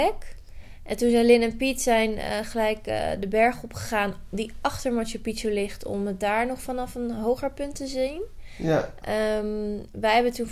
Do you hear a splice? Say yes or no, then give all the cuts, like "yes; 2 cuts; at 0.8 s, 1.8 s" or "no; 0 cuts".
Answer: no; 0 cuts